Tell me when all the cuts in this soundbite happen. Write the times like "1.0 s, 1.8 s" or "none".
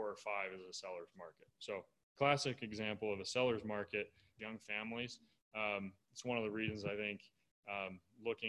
4.4 s